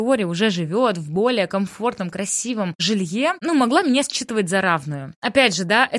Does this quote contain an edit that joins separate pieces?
no; 0 cuts

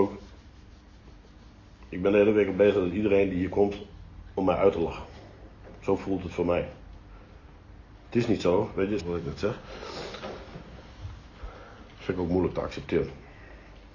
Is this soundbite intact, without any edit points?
no; 1 cut; at 9.0 s

